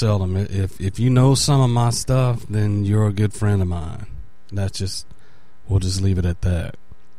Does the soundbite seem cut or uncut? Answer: uncut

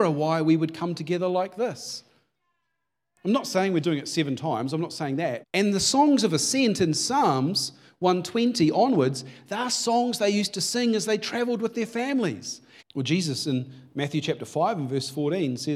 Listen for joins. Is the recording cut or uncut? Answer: cut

